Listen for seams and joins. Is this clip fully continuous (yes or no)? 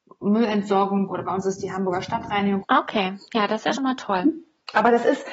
no